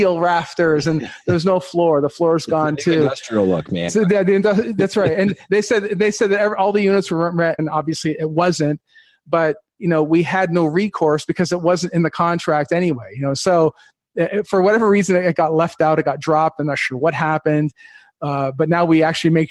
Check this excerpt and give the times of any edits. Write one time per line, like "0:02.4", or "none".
0:03.9
0:07.6